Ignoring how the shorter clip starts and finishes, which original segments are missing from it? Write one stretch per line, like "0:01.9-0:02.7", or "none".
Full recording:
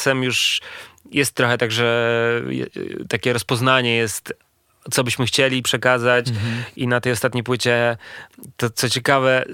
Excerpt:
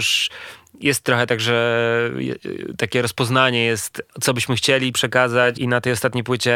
0:04.4-0:04.8
0:06.2-0:06.7